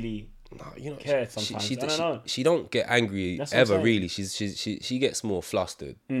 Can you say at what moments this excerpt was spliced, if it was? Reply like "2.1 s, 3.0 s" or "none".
none